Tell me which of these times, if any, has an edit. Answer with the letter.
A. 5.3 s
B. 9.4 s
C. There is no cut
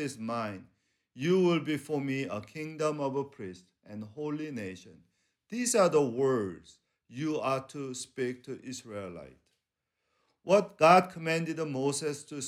C